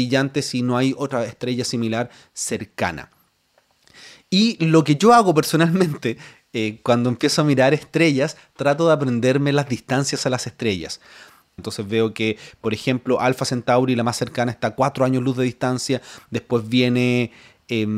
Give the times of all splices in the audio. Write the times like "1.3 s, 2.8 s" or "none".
11.6 s

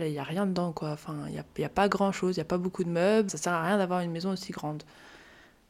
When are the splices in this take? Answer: 3.3 s

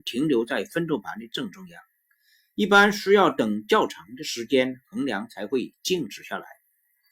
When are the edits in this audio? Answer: none

